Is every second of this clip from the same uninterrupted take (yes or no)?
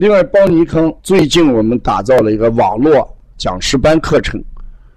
no